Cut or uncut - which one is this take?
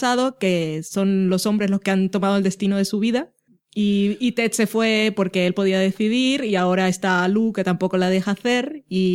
uncut